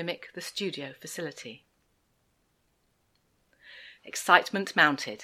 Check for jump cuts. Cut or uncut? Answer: cut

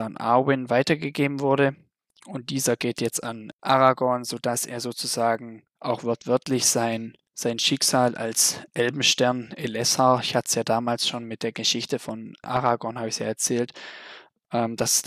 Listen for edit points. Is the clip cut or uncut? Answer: uncut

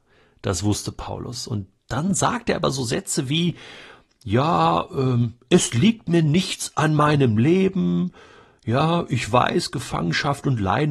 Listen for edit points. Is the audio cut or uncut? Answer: uncut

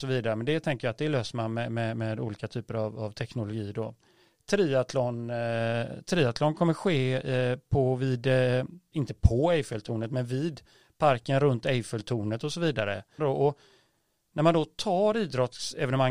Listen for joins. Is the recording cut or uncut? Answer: cut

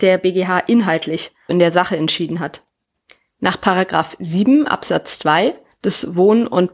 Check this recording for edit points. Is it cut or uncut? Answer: cut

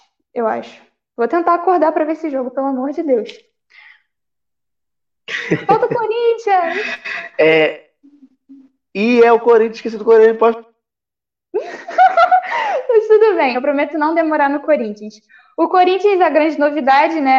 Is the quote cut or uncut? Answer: cut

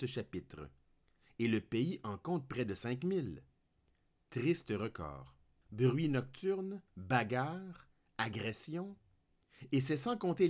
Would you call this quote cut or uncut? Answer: cut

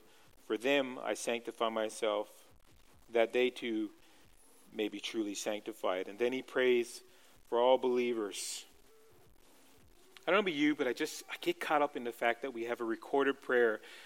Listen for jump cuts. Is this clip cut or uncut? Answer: uncut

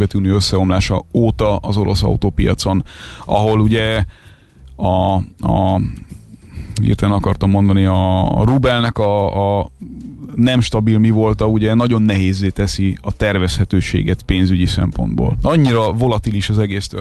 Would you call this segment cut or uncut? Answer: cut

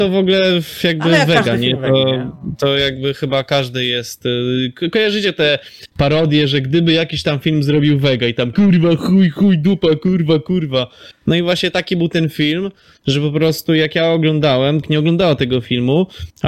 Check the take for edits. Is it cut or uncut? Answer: cut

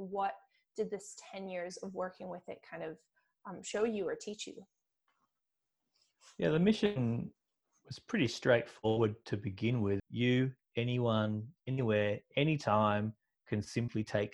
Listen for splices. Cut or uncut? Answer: cut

